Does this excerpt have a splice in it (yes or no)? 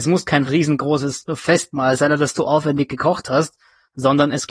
no